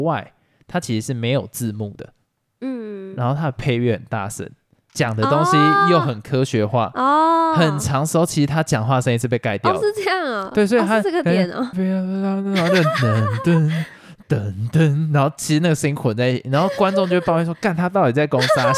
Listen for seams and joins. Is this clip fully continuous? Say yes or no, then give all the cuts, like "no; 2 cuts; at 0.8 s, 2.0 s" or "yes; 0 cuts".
no; 1 cut; at 11.7 s